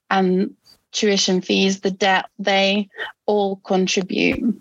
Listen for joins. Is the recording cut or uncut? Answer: cut